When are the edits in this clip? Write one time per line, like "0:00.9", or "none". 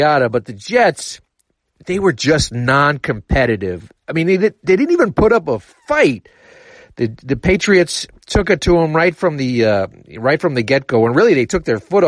none

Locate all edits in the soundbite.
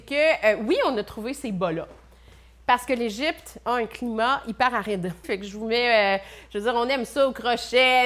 0:05.2

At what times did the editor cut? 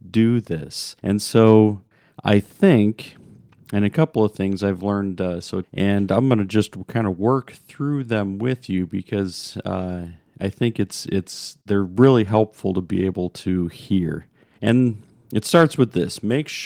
0:05.6

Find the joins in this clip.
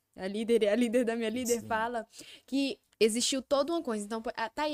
0:02.8

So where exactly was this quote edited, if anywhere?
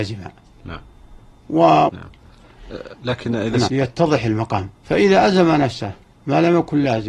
0:01.9
0:03.7
0:04.7

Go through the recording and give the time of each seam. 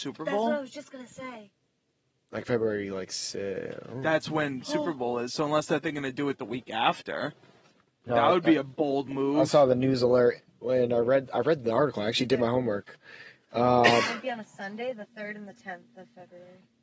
none

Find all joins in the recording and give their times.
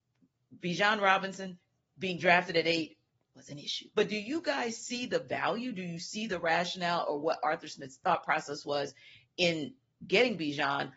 0:03.9

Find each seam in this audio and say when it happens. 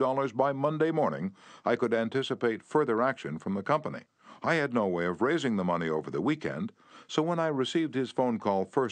none

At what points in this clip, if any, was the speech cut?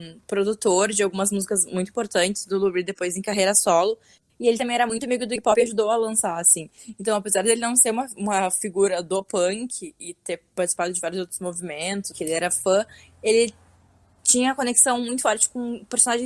0:12.1

